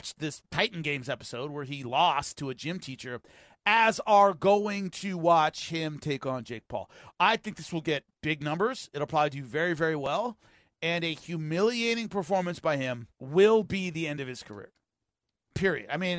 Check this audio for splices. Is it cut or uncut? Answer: cut